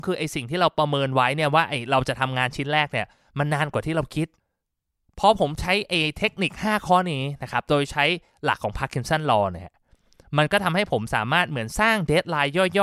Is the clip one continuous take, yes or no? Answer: yes